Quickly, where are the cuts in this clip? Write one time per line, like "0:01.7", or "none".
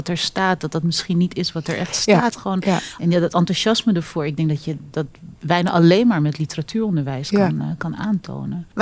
0:03.0